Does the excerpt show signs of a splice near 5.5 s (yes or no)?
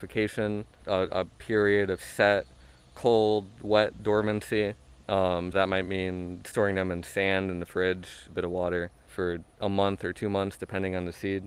yes